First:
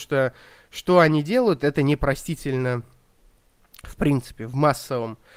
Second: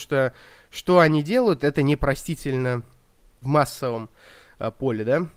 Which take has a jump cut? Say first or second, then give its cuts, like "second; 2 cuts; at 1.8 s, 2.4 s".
second; 1 cut; at 3.4 s